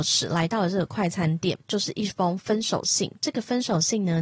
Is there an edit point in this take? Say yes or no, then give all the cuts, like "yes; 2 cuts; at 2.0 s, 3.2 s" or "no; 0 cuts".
no; 0 cuts